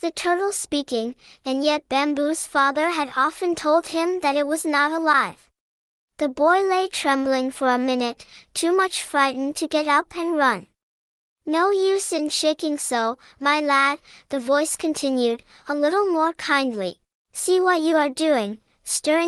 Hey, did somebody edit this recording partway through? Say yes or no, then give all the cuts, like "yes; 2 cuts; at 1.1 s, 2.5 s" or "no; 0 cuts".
yes; 1 cut; at 17.2 s